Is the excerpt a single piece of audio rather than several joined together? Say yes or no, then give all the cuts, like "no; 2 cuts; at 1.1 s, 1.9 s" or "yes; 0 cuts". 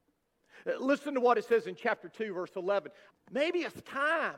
no; 1 cut; at 3.1 s